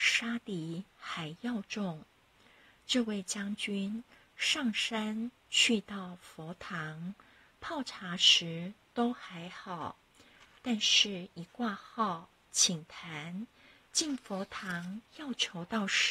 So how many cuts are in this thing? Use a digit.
0